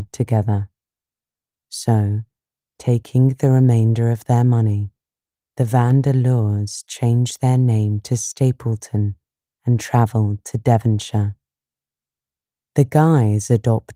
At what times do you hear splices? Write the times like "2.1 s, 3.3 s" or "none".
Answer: 1.6 s